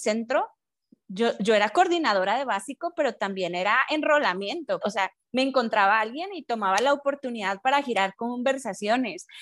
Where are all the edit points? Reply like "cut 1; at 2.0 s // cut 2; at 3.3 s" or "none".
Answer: cut 1; at 4.8 s

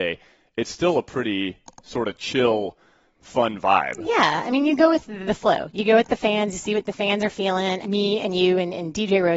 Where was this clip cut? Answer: cut 1; at 7.8 s

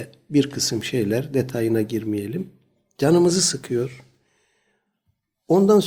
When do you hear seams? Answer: none

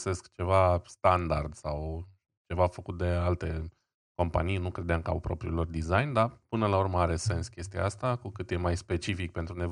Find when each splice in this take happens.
none

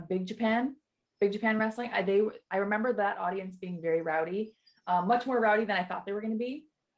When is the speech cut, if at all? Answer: none

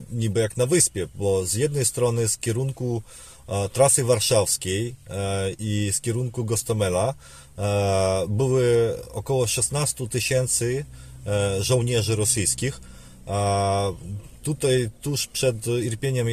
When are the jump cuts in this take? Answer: none

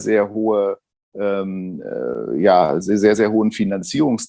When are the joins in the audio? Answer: none

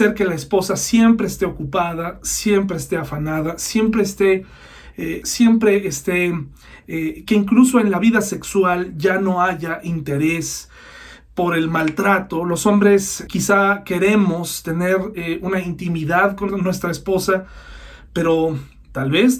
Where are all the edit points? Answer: cut 1; at 5.2 s // cut 2; at 13.3 s // cut 3; at 16.5 s

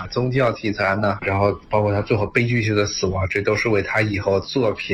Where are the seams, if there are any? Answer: cut 1; at 1.2 s

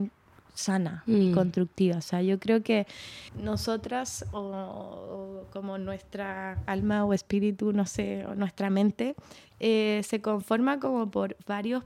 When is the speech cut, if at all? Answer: cut 1; at 3.3 s

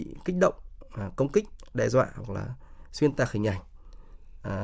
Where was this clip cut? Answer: none

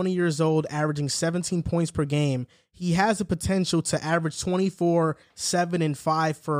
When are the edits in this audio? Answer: none

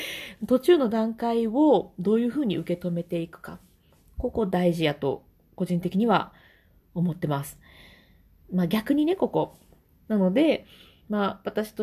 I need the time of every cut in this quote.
cut 1; at 10.1 s

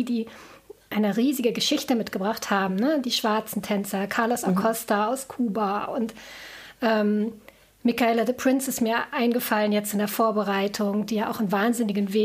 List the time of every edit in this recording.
none

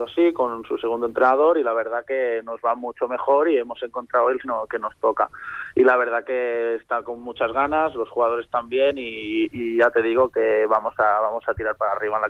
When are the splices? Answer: cut 1; at 4.4 s

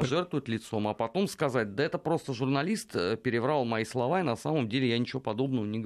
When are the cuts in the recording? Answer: none

